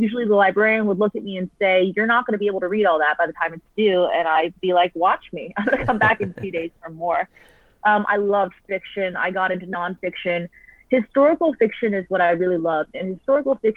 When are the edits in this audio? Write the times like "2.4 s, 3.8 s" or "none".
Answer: none

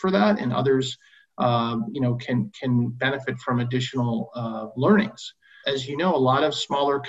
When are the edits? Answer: 5.6 s

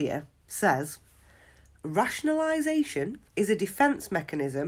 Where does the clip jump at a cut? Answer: 3.3 s

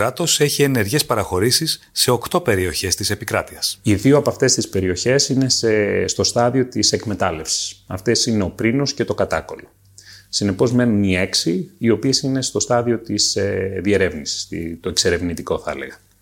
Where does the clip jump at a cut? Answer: none

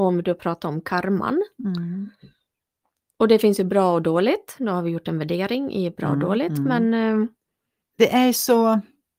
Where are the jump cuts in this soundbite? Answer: 7.8 s

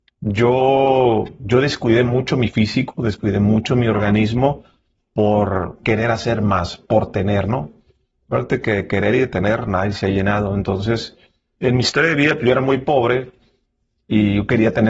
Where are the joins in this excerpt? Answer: none

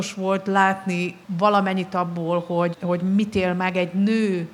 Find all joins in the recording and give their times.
1.2 s, 2.7 s

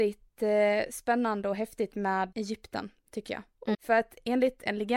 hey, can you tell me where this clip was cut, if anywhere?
2.3 s, 3.7 s

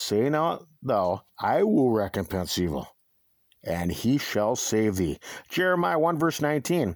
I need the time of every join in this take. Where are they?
3.4 s

